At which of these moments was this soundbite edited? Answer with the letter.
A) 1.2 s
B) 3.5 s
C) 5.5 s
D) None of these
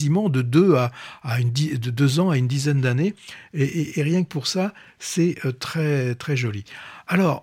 D